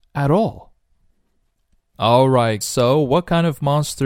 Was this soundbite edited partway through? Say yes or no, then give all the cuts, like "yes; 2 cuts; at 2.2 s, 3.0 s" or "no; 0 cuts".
yes; 1 cut; at 2.6 s